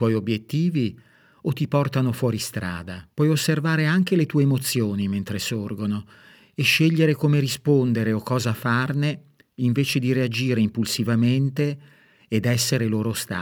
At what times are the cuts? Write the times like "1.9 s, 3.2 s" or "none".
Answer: 3.1 s